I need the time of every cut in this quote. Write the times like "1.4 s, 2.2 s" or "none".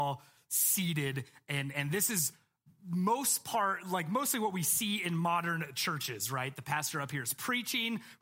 none